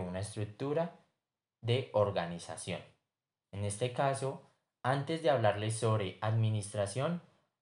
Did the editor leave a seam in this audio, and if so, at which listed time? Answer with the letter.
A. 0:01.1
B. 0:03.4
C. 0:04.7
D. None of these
B